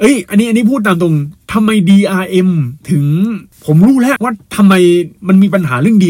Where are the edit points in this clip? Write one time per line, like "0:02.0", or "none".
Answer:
0:04.2